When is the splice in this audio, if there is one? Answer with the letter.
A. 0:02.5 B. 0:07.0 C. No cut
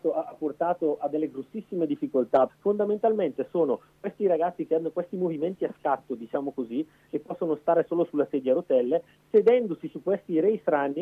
A